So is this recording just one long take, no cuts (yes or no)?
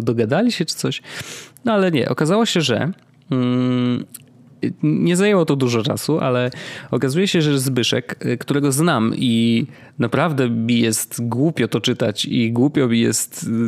yes